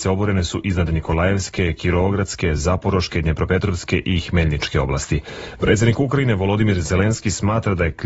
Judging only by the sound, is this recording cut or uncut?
uncut